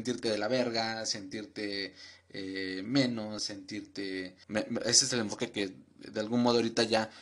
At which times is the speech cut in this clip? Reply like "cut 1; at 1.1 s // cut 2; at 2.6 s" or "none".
cut 1; at 4.4 s